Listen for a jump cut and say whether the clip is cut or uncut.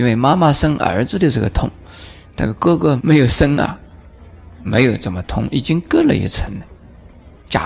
uncut